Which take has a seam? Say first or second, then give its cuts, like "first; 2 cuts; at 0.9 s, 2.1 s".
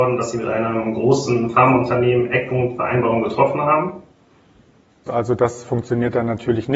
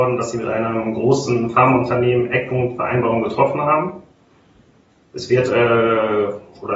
first; 1 cut; at 5.1 s